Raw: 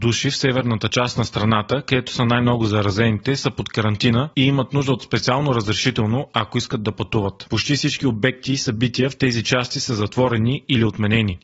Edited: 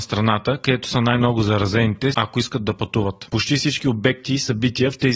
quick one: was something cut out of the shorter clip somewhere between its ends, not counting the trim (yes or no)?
yes